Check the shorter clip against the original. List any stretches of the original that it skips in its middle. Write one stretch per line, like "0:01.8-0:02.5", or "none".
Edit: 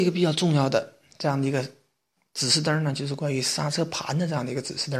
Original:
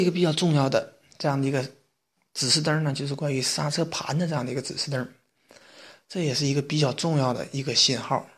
none